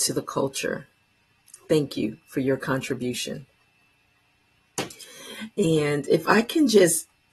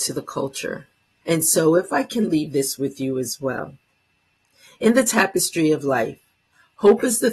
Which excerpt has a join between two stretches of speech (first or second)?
second